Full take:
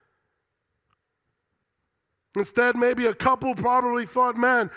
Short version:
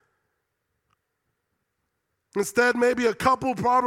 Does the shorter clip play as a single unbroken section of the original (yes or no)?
yes